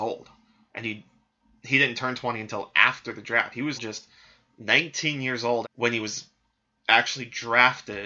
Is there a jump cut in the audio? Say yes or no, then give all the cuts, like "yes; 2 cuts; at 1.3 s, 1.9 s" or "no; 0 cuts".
yes; 2 cuts; at 3.7 s, 5.6 s